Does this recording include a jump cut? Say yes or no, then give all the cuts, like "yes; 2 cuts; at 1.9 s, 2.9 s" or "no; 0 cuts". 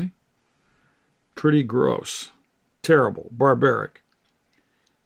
yes; 1 cut; at 1.3 s